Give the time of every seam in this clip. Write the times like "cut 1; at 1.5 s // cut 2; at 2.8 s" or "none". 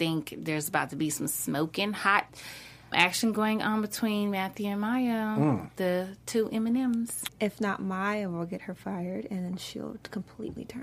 cut 1; at 2.9 s // cut 2; at 7.3 s